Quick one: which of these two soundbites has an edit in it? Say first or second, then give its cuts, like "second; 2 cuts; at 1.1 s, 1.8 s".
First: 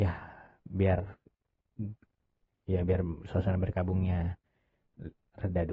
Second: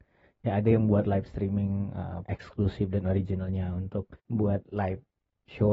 second; 2 cuts; at 2.3 s, 4.2 s